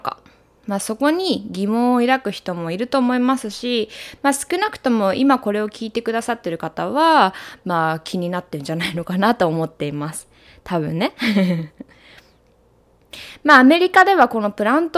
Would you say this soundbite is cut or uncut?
uncut